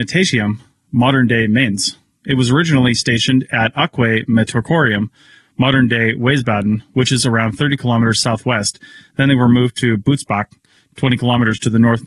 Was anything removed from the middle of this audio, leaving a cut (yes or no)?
no